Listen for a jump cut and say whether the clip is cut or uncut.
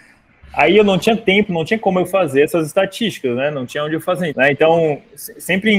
cut